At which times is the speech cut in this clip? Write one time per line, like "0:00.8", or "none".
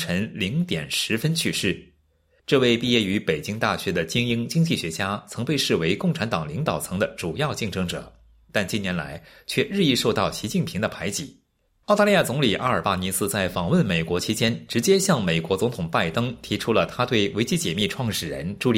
0:11.7